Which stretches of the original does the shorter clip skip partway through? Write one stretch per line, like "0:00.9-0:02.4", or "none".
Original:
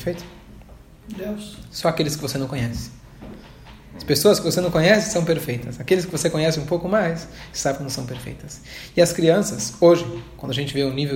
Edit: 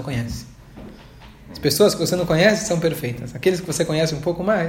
none